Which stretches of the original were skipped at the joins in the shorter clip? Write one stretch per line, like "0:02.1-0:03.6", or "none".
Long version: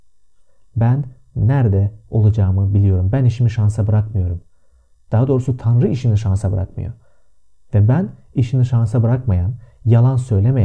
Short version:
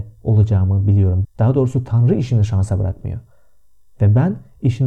0:03.1-0:05.0